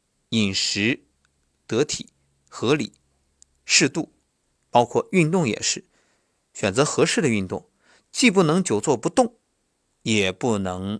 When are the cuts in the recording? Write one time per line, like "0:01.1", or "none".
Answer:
none